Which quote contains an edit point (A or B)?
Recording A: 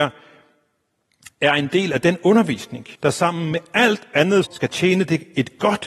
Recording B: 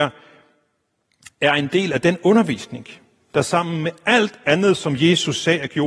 A